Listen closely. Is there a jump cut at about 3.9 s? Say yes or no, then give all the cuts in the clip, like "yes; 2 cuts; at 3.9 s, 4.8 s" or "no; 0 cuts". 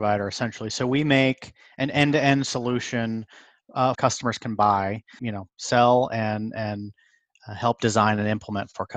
yes; 2 cuts; at 3.9 s, 5.2 s